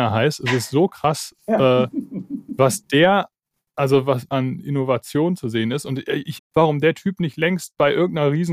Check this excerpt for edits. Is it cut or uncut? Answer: cut